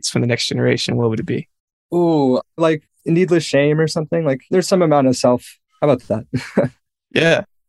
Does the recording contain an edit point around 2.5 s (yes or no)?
yes